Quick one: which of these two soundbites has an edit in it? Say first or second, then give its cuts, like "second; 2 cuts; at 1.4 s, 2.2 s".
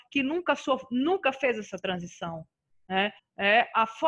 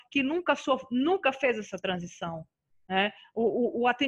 first; 1 cut; at 3.2 s